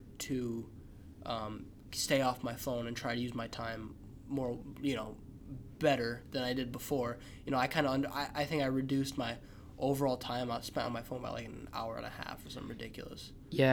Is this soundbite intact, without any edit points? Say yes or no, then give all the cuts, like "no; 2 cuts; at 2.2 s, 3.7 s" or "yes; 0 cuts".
yes; 0 cuts